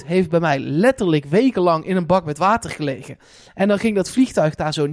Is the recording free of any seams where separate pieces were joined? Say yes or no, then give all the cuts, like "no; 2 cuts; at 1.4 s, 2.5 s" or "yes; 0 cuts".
yes; 0 cuts